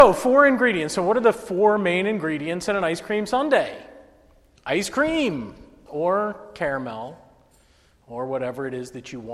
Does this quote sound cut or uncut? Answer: cut